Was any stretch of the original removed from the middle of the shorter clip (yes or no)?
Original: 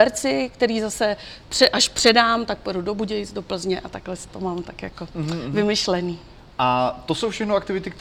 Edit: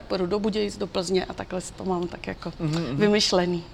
no